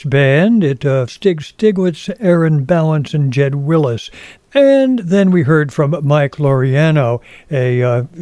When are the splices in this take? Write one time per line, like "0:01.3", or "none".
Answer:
0:01.1
0:04.4